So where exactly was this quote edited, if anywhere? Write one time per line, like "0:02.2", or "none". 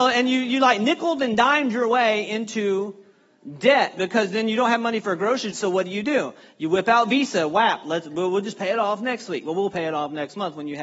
0:05.5